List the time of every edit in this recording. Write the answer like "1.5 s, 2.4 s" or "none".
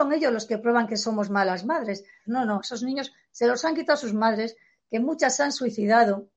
2.3 s